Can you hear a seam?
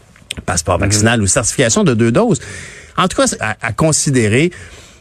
yes; 1 cut; at 3.4 s

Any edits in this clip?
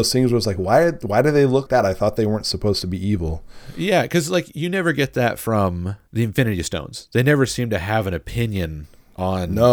yes; 1 cut; at 1.7 s

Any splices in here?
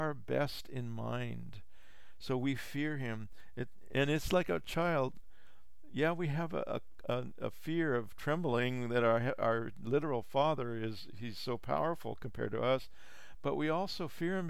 no; 0 cuts

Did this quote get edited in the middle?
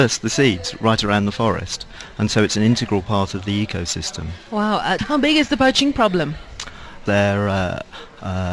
yes; 2 cuts; at 5.0 s, 7.1 s

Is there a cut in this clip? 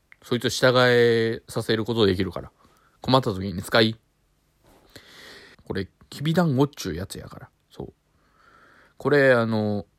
yes; 1 cut; at 5.5 s

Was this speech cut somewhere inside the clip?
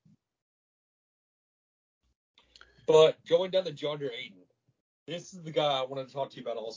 no; 0 cuts

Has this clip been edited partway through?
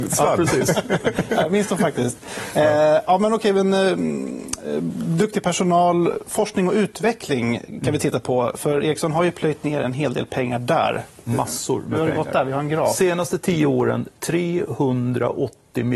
no; 0 cuts

